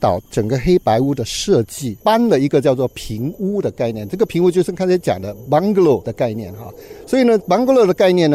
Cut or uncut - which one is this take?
cut